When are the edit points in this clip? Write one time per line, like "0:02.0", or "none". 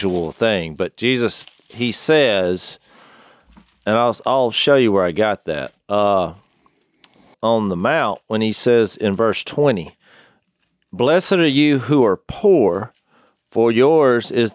0:07.3